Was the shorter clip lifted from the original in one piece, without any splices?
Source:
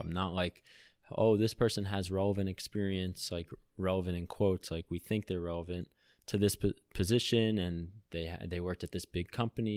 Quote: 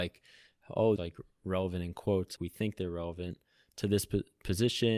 no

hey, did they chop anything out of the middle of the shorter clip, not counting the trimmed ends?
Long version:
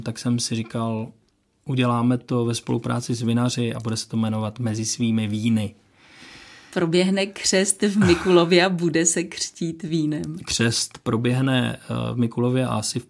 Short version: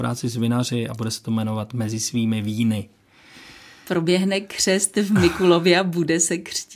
no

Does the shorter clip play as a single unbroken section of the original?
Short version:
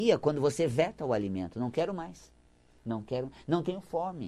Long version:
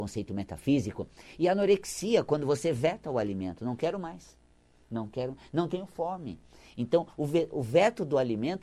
yes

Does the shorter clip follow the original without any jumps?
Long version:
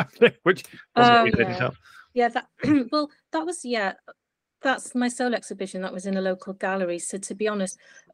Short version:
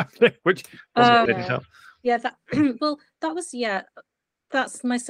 no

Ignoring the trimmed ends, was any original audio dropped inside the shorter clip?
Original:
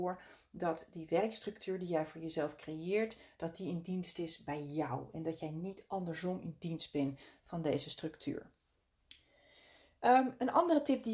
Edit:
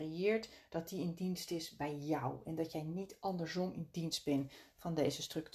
no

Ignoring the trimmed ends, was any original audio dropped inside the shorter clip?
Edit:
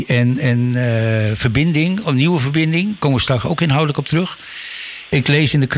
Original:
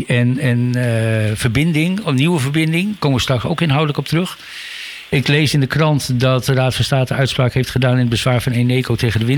no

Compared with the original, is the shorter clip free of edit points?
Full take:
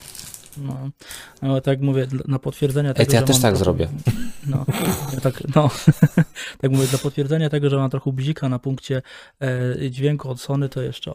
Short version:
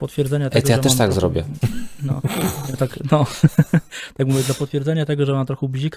yes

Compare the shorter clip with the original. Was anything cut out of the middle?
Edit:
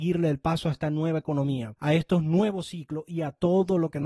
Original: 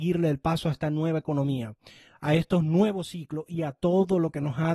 yes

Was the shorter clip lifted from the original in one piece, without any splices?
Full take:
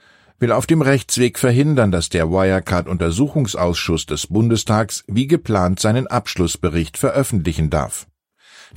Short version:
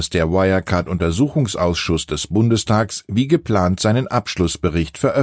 yes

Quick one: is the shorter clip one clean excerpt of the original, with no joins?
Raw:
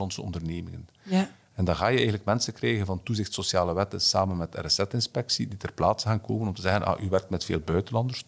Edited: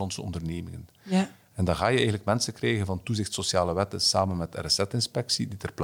yes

